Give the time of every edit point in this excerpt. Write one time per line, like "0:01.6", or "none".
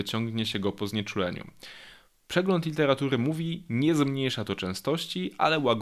none